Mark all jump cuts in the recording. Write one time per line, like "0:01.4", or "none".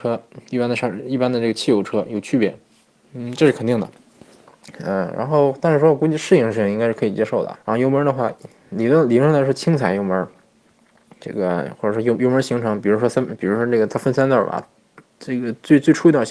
0:07.5